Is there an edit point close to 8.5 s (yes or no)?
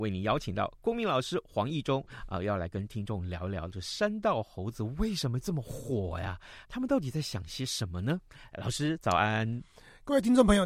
no